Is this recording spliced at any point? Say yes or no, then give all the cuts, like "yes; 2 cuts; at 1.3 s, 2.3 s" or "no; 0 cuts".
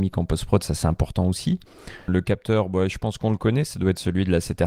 yes; 1 cut; at 2.1 s